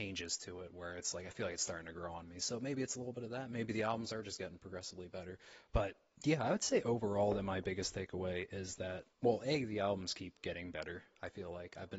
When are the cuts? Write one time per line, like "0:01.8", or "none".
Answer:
0:05.7
0:09.1